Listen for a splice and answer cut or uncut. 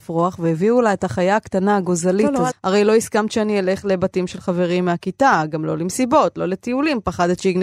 cut